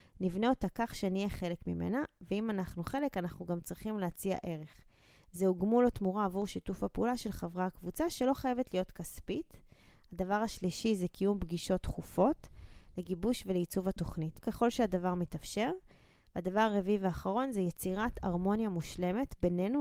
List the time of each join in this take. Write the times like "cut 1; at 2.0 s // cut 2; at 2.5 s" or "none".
cut 1; at 14.4 s